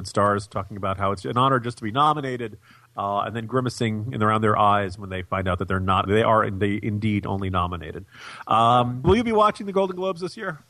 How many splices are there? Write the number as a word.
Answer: two